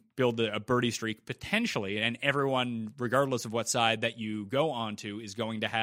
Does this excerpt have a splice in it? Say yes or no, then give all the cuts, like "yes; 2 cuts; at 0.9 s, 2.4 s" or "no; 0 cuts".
no; 0 cuts